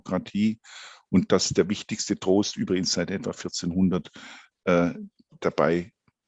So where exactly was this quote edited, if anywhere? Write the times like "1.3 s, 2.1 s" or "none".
none